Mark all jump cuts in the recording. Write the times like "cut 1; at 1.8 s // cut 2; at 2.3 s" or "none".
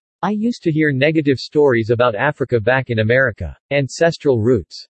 cut 1; at 3.7 s